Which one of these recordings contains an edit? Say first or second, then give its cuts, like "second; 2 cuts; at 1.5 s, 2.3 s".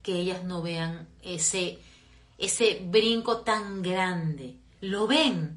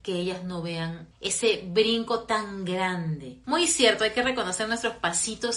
second; 2 cuts; at 1.1 s, 3.4 s